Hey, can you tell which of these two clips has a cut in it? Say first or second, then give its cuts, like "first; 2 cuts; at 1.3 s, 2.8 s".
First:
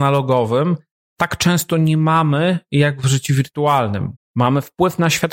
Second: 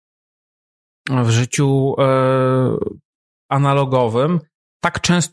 first; 1 cut; at 4.2 s